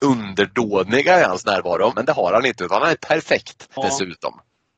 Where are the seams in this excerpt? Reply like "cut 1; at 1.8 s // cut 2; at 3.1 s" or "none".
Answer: cut 1; at 1.9 s // cut 2; at 3.8 s